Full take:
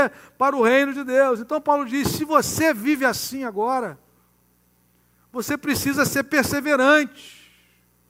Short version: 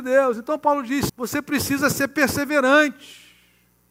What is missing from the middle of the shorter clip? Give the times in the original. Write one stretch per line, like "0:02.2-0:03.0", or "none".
0:02.1-0:05.2